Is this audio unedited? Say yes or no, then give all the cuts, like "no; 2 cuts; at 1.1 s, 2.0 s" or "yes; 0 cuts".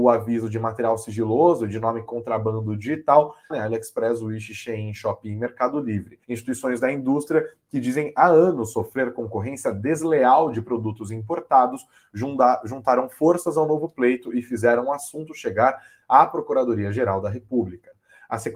no; 2 cuts; at 3.5 s, 6.2 s